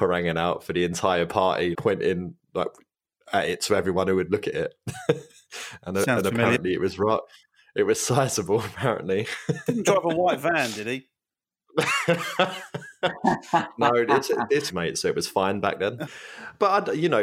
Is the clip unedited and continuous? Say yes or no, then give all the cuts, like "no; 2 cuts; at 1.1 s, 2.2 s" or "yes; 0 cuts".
no; 3 cuts; at 1.7 s, 14.7 s, 16.1 s